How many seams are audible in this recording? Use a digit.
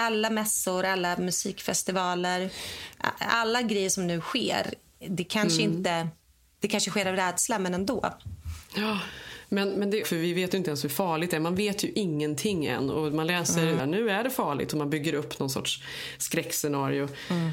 2